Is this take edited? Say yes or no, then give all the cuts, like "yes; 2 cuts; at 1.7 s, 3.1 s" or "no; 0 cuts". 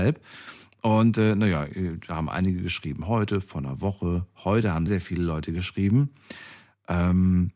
yes; 1 cut; at 4.9 s